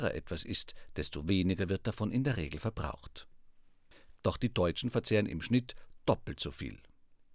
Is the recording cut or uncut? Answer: cut